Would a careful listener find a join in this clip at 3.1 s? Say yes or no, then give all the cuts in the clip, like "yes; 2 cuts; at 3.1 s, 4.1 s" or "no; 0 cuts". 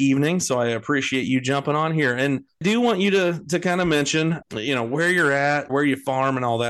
no; 1 cut; at 5.7 s